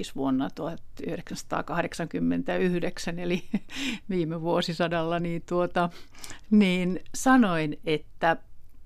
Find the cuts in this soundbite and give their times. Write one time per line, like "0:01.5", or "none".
none